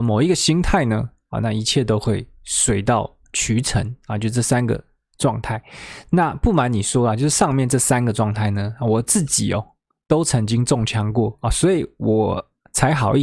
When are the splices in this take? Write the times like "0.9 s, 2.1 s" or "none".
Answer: none